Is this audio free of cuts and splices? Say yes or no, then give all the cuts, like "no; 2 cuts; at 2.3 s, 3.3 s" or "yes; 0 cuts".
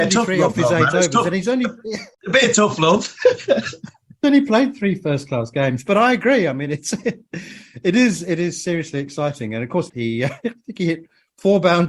no; 2 cuts; at 2.1 s, 9.9 s